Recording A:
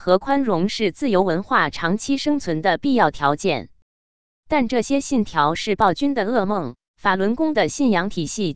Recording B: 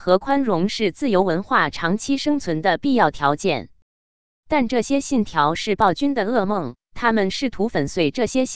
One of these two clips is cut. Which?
A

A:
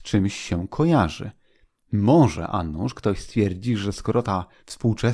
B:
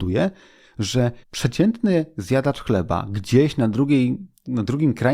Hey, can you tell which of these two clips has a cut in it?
B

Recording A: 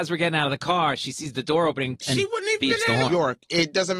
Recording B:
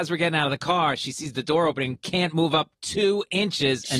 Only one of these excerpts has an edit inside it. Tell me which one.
A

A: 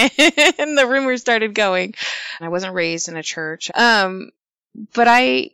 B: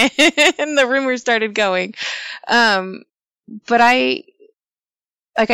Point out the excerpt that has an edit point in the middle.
A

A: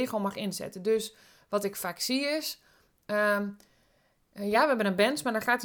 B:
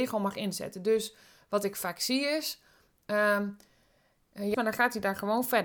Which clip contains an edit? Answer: B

